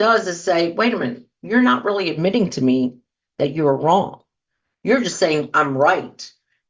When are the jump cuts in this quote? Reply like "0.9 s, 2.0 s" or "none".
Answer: none